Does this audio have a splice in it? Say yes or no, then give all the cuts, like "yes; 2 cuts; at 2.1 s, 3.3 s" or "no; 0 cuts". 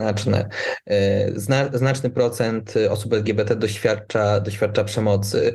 no; 0 cuts